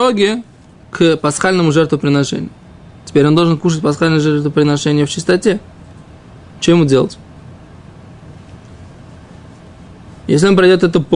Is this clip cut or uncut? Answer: uncut